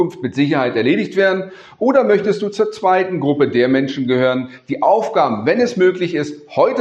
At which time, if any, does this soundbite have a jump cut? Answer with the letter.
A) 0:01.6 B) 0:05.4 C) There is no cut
C